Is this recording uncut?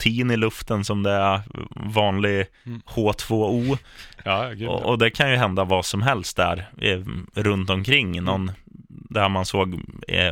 no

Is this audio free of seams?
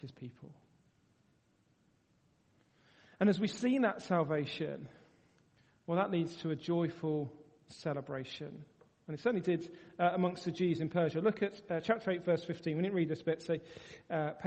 yes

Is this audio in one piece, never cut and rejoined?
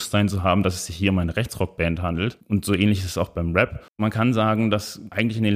no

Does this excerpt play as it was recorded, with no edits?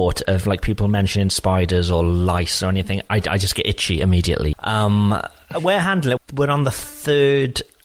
no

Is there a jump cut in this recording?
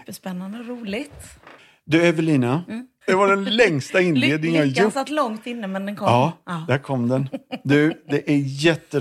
yes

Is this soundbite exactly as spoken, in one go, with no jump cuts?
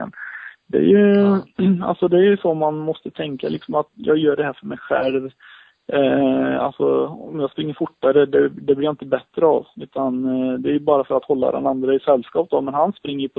yes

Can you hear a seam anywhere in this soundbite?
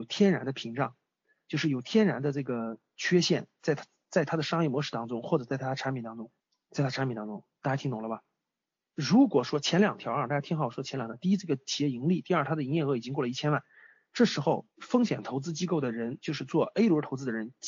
yes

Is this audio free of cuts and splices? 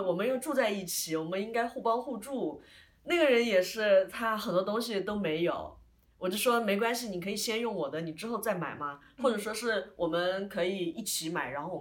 yes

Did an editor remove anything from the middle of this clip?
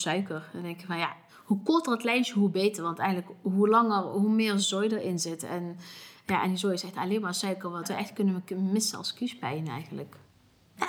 no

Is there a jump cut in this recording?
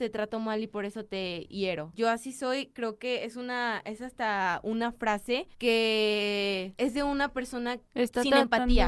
yes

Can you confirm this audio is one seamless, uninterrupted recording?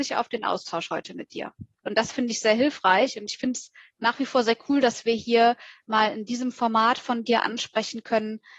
no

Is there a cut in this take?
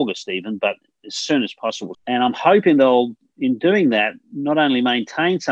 yes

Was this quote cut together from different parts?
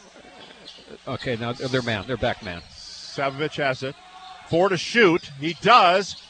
no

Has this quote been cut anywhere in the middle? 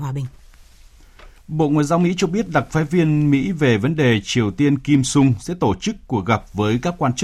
yes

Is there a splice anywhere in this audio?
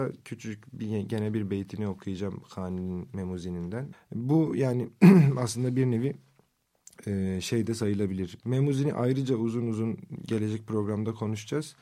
yes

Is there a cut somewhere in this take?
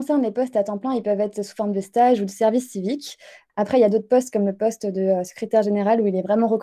yes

